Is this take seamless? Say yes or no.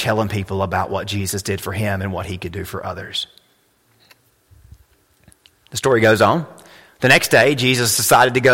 yes